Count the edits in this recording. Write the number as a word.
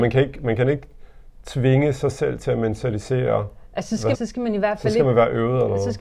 one